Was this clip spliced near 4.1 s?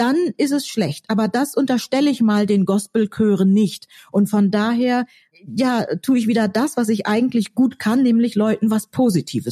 no; 1 cut; at 5.3 s

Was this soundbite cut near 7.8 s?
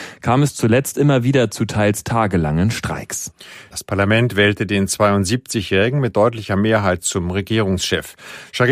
no; 1 cut; at 3.7 s

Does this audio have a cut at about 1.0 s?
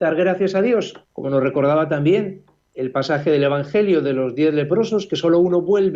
yes; 1 cut; at 1.0 s

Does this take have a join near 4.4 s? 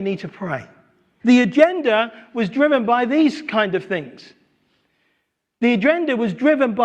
no; 1 cut; at 1.2 s

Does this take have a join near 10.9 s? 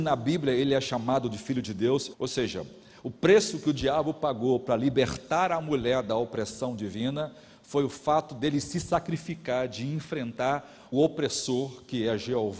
yes; 2 cuts; at 2.1 s, 10.9 s

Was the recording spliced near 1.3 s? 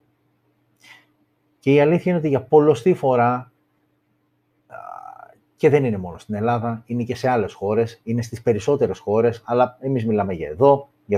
no; 0 cuts

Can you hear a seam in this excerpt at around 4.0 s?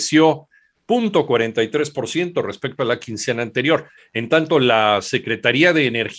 yes; 1 cut; at 4.0 s

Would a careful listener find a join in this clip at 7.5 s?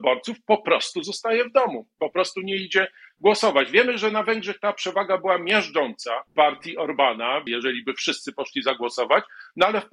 yes; 2 cuts; at 6.3 s, 7.5 s

